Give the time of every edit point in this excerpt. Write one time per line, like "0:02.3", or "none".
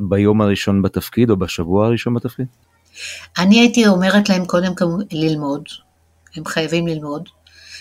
none